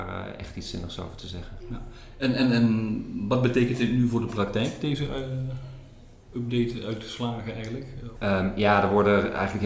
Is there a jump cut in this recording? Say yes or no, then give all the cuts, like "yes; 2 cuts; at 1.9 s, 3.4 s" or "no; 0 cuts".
yes; 2 cuts; at 1.6 s, 8.2 s